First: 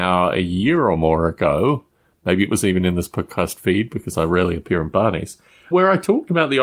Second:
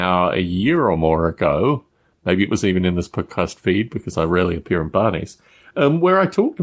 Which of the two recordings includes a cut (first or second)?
first